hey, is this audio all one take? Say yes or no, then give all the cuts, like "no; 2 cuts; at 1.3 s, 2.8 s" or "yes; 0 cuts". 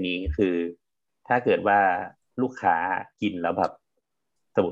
yes; 0 cuts